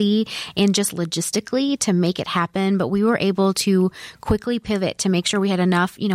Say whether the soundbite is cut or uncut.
uncut